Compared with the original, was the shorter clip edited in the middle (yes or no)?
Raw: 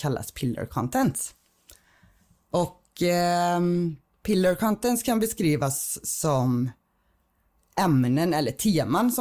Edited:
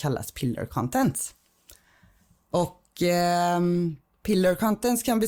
no